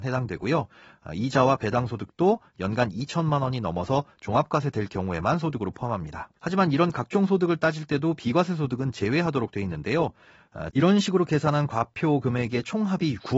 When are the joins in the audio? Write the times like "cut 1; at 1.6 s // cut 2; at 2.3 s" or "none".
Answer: cut 1; at 6.4 s // cut 2; at 10.7 s